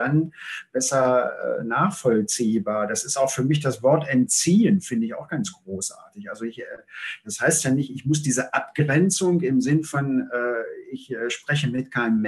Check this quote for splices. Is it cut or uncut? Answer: uncut